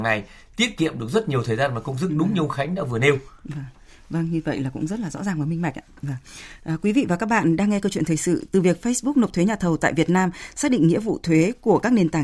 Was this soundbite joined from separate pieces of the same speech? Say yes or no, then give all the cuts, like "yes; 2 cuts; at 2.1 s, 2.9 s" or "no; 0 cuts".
no; 0 cuts